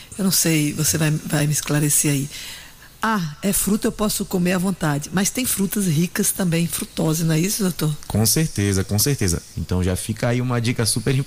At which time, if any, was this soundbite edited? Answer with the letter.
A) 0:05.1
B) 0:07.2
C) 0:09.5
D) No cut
C